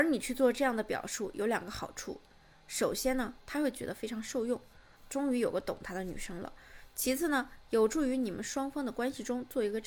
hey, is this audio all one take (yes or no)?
yes